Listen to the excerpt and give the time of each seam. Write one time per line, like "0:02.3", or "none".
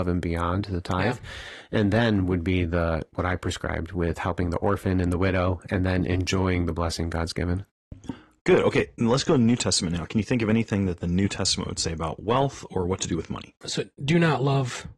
0:13.6